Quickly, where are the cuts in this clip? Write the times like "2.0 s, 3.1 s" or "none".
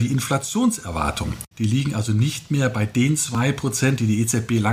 1.5 s